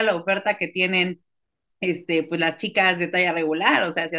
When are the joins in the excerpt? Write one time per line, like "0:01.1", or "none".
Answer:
none